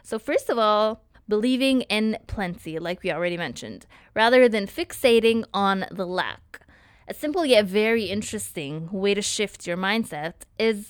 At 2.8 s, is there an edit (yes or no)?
no